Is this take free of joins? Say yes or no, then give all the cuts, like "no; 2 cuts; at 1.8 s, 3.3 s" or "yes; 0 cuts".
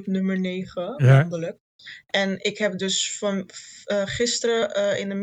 yes; 0 cuts